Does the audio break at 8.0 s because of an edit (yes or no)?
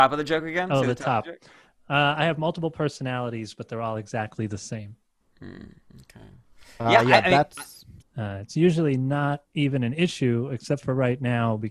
yes